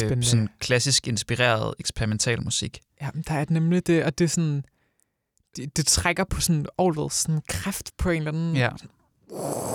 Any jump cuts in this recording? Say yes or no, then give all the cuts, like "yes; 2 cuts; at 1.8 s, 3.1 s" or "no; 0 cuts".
no; 0 cuts